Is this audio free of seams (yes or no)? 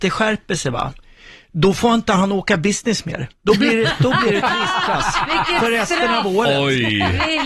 yes